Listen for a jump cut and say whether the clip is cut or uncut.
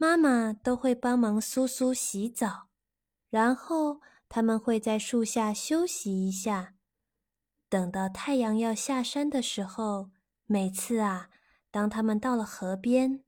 cut